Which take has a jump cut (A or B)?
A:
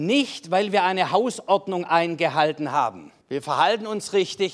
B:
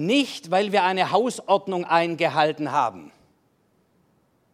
A